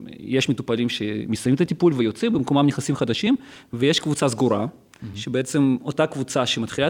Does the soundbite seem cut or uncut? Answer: uncut